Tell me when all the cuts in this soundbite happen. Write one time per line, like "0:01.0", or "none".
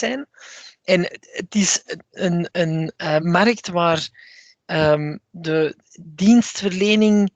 none

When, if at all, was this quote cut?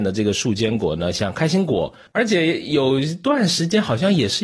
0:02.1

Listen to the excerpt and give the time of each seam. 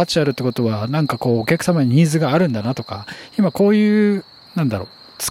none

